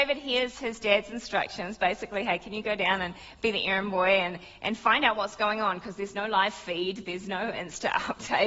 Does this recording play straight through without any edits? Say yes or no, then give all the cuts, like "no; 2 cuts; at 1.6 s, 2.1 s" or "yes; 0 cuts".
yes; 0 cuts